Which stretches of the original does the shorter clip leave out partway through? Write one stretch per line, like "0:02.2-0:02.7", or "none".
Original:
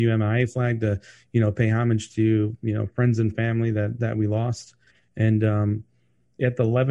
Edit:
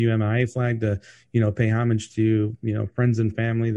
none